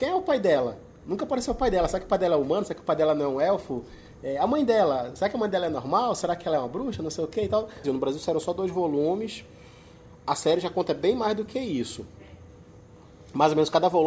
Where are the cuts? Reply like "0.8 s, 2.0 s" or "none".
7.8 s